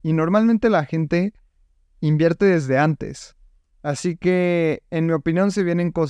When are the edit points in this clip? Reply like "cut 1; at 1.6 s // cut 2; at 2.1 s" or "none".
none